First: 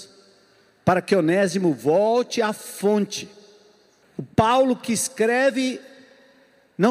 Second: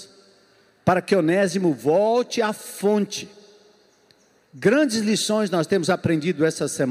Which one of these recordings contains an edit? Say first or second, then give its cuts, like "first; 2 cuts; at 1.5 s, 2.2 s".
first; 1 cut; at 4.0 s